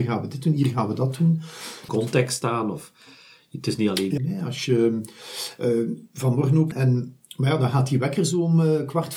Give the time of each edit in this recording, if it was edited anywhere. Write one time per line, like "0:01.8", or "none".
0:01.9
0:04.2
0:06.7